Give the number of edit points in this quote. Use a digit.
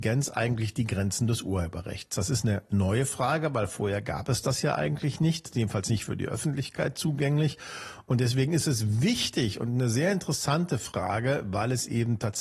0